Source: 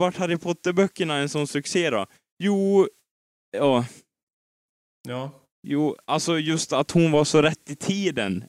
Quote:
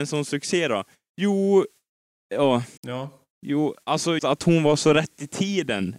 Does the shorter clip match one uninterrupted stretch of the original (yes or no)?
no